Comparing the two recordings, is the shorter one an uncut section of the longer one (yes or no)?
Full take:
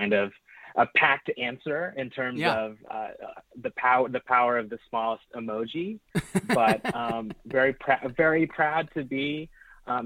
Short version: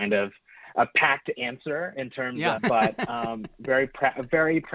no